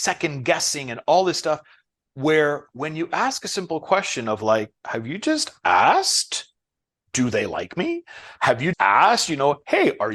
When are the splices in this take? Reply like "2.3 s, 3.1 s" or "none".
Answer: 4.8 s, 8.7 s